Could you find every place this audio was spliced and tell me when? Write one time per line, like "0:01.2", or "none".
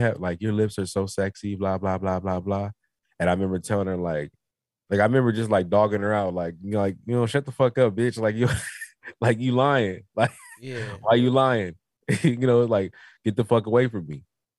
none